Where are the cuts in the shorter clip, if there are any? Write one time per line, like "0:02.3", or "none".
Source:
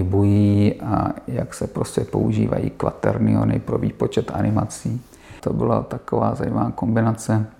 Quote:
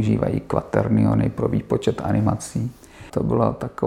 none